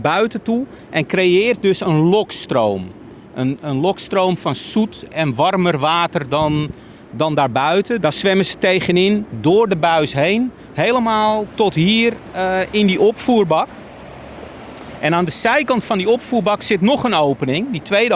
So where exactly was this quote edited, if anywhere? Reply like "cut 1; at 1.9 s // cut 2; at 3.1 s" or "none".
cut 1; at 8.0 s

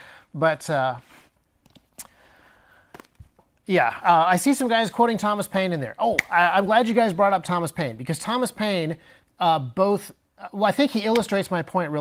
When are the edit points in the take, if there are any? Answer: none

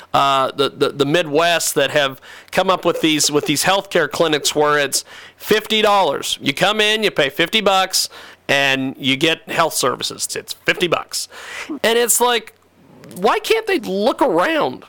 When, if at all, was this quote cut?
cut 1; at 10.3 s // cut 2; at 11.8 s // cut 3; at 13.8 s

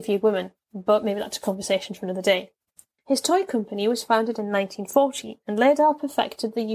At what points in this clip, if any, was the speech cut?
cut 1; at 3.0 s

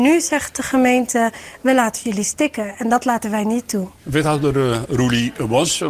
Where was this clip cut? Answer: cut 1; at 4.0 s

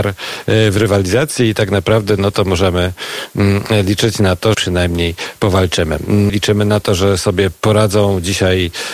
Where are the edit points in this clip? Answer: cut 1; at 4.5 s // cut 2; at 6.3 s

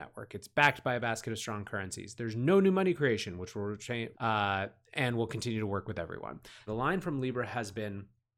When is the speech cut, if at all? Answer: cut 1; at 4.1 s // cut 2; at 6.7 s

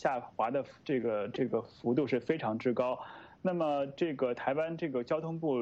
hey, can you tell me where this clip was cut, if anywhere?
none

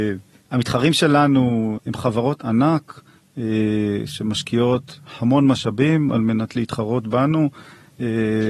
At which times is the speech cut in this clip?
cut 1; at 1.8 s

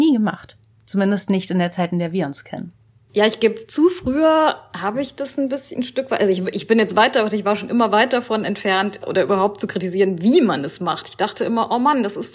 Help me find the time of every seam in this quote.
cut 1; at 9.0 s // cut 2; at 11.0 s

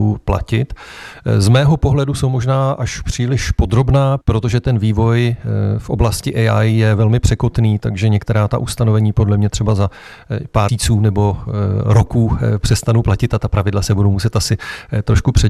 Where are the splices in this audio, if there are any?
cut 1; at 10.7 s

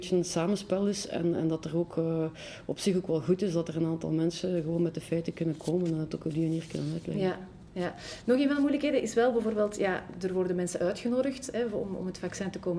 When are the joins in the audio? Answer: none

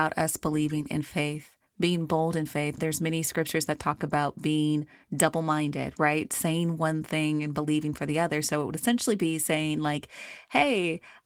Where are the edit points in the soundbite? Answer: cut 1; at 2.8 s

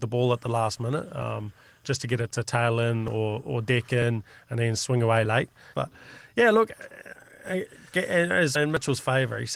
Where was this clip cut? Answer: cut 1; at 5.7 s // cut 2; at 8.6 s

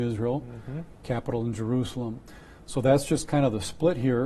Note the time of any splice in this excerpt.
cut 1; at 0.9 s

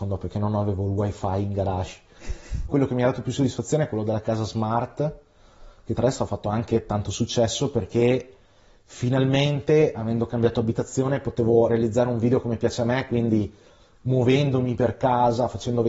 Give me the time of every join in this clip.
cut 1; at 2.7 s

